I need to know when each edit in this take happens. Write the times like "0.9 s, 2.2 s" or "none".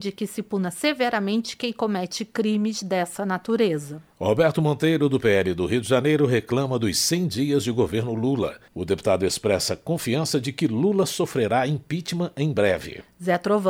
8.7 s